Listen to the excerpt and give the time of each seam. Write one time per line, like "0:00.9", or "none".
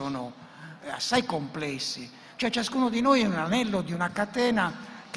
none